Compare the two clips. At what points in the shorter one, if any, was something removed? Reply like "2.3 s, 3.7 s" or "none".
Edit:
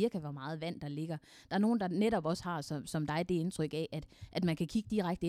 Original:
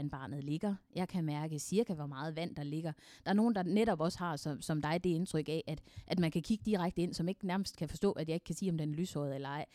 none